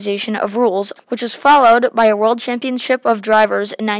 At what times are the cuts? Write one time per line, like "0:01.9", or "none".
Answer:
0:01.0